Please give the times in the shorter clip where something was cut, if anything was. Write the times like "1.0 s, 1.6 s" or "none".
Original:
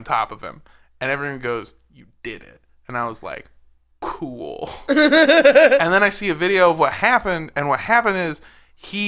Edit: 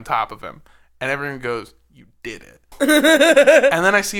2.7 s